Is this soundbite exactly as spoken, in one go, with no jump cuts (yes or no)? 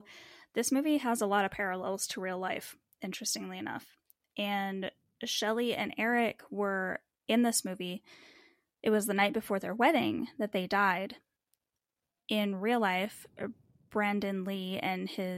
yes